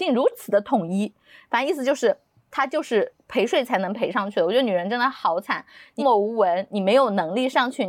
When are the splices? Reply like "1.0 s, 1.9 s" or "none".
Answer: 6.0 s